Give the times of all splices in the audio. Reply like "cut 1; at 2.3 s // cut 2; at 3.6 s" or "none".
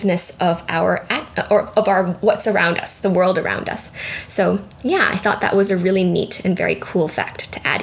none